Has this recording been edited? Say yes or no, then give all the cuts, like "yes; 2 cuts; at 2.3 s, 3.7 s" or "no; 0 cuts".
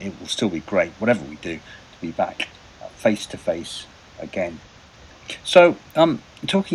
no; 0 cuts